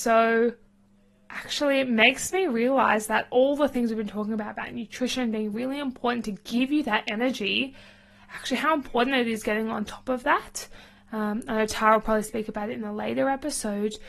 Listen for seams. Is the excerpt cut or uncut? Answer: uncut